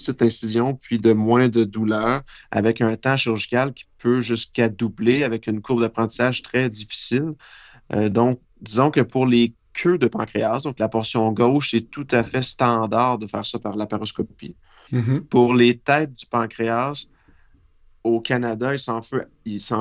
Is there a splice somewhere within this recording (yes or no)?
no